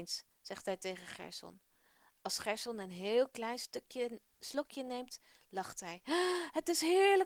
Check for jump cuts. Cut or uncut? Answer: uncut